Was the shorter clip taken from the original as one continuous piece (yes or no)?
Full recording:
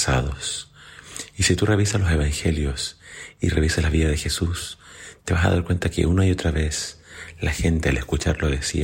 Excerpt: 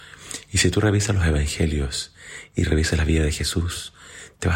yes